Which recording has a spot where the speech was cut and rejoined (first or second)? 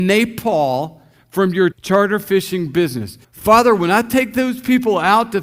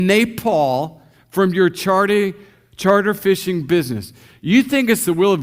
first